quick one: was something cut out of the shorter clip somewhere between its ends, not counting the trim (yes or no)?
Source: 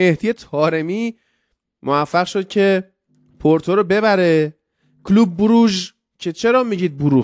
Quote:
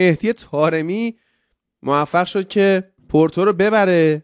yes